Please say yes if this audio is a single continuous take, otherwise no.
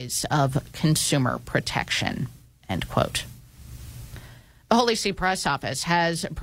yes